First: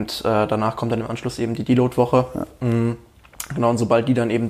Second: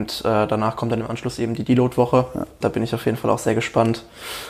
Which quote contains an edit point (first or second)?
second